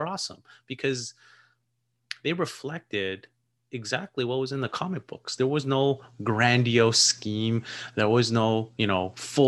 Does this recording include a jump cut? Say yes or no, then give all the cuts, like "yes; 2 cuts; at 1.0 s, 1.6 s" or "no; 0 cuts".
no; 0 cuts